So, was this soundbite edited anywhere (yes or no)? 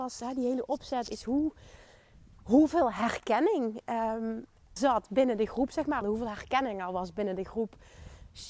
yes